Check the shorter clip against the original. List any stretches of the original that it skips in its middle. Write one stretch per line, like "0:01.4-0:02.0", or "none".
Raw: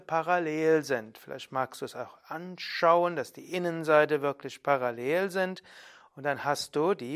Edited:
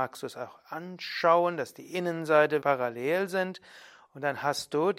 0:04.2-0:04.6

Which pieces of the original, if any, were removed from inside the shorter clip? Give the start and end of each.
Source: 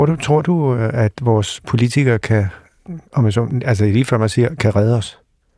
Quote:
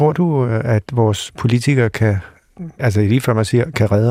0:03.1-0:03.6

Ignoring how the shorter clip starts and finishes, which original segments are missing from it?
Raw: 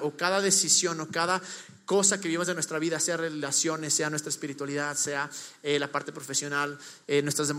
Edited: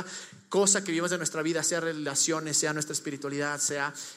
none

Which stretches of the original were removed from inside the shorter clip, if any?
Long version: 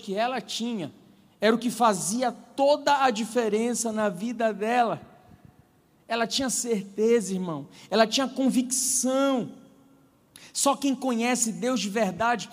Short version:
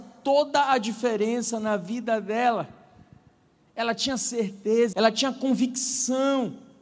0:07.3-0:07.9

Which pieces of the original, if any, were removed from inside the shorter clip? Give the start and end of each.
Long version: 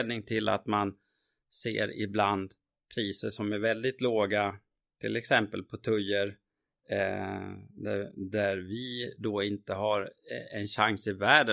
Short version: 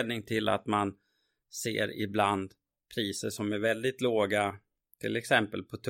none

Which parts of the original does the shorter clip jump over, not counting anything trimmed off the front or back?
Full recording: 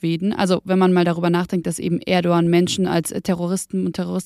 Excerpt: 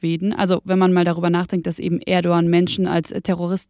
none

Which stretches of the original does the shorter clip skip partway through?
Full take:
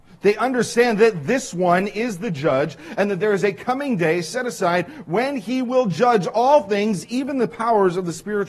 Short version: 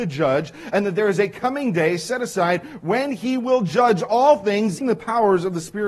0:07.1-0:07.3

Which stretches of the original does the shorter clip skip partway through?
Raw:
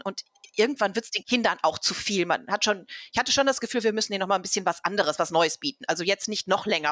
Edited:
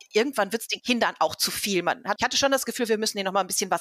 0:02.6-0:03.1

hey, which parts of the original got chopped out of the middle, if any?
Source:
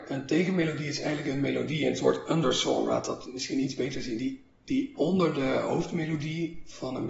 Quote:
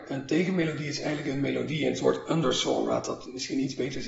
none

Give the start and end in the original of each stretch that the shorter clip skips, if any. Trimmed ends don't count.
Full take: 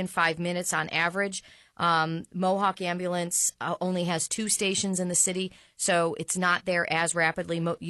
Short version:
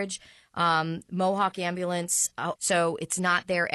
0:03.8-0:05.7

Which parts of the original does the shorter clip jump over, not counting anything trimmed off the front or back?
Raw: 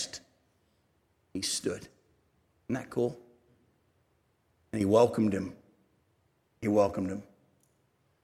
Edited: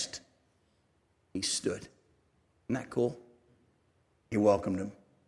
0:04.2-0:06.5

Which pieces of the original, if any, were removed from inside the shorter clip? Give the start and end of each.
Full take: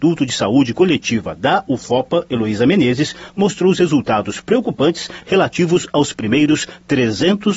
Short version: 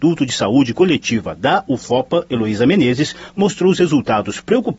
none

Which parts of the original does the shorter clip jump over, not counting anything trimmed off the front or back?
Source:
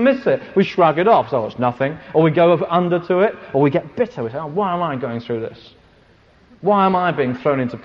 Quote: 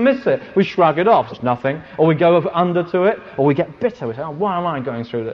0:01.3-0:01.5

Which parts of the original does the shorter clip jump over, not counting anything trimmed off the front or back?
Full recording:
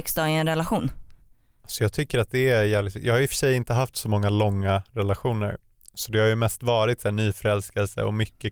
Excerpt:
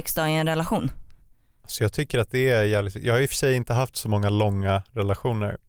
none

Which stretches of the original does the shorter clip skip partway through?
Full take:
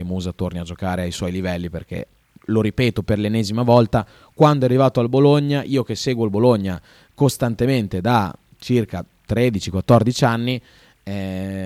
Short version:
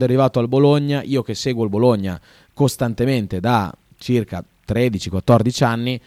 none

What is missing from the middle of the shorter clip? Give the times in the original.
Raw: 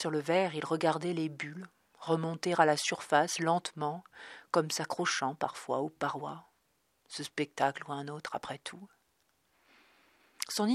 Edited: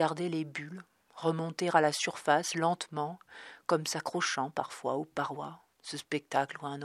0:06.6-0:07.0

